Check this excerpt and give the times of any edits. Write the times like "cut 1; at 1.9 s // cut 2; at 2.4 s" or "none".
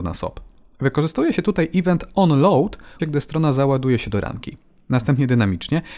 cut 1; at 3.0 s